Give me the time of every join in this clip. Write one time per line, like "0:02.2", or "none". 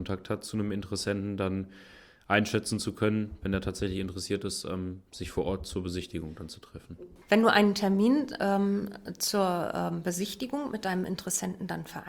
none